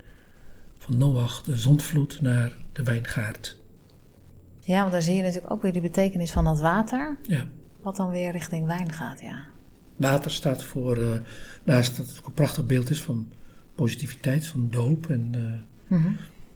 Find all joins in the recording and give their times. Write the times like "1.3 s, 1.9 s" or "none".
none